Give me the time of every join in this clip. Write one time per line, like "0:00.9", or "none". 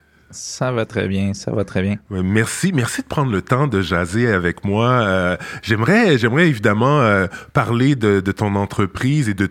none